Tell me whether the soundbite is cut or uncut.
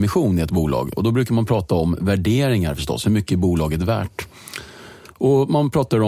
uncut